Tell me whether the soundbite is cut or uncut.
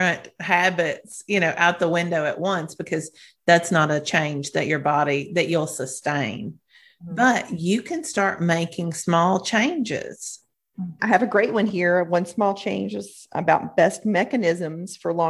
cut